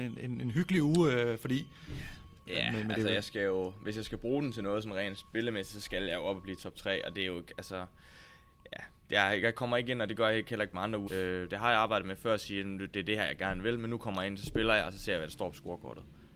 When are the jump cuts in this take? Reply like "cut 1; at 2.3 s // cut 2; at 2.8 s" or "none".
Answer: cut 1; at 2.4 s // cut 2; at 11.1 s